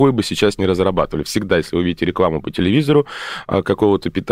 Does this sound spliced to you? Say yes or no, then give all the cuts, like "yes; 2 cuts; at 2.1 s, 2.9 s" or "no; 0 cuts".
no; 0 cuts